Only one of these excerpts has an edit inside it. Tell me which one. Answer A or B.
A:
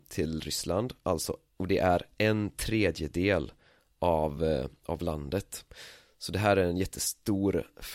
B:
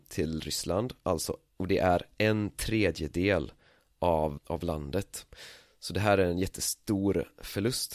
B